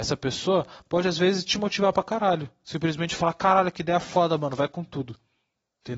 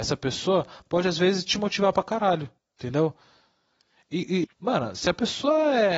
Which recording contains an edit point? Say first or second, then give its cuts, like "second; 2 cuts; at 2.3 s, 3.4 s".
second; 2 cuts; at 2.6 s, 4.4 s